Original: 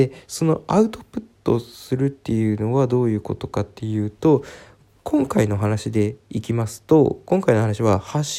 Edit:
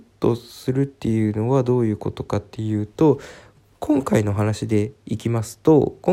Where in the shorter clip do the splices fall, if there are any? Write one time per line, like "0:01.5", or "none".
none